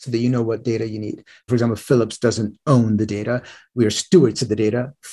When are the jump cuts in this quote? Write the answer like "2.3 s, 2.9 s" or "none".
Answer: 1.5 s